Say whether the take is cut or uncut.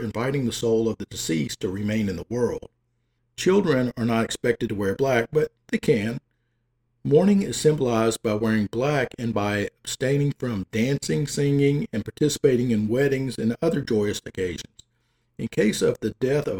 cut